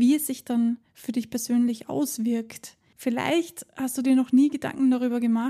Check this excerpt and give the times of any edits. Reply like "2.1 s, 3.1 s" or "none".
2.9 s